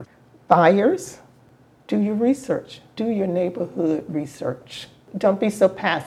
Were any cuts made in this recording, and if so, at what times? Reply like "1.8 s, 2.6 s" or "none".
none